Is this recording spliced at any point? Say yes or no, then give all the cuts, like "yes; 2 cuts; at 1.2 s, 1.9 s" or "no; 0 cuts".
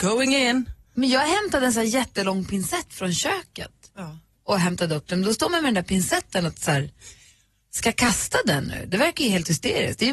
no; 0 cuts